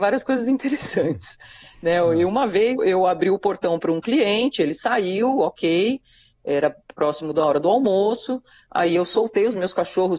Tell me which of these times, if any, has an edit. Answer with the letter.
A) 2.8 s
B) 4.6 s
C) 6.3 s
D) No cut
A